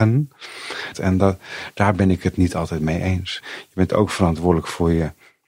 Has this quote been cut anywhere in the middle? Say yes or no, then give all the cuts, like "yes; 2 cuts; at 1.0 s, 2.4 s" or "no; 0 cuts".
yes; 2 cuts; at 0.9 s, 3.4 s